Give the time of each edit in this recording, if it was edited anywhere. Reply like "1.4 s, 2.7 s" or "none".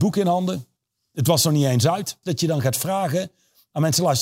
2.2 s